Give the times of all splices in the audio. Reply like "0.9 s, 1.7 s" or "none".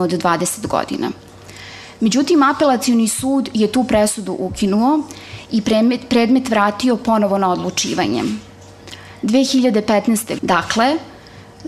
10.4 s